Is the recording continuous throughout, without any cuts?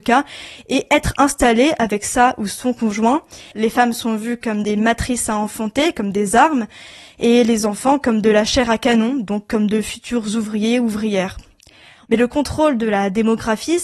no; 2 cuts; at 3.5 s, 12.1 s

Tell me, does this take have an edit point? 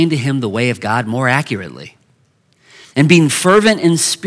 yes; 1 cut; at 2.8 s

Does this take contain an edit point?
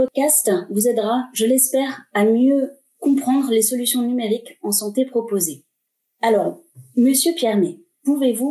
no; 0 cuts

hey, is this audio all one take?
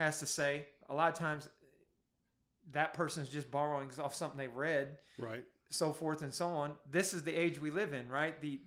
yes; 0 cuts

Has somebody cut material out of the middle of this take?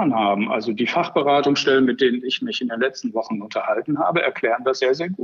no; 0 cuts

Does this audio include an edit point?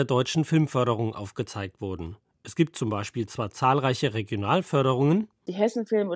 no; 0 cuts

